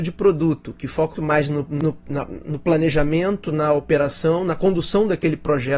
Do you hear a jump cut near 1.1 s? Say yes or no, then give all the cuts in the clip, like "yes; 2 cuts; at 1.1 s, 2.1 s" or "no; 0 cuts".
yes; 1 cut; at 1.1 s